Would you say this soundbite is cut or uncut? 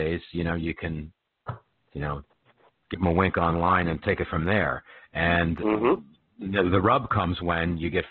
uncut